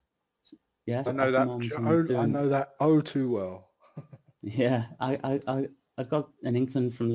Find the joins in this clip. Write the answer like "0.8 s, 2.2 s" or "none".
1.1 s